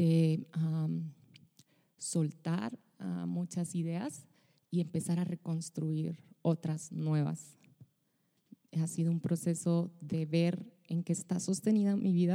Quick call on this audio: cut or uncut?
uncut